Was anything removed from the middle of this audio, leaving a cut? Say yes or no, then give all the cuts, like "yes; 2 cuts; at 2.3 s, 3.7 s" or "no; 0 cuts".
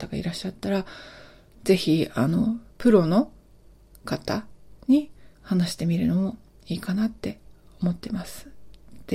yes; 3 cuts; at 1.5 s, 2.7 s, 5.3 s